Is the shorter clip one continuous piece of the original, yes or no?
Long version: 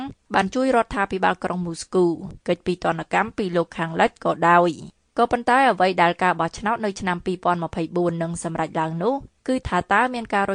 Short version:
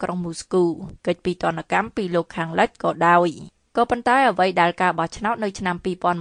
yes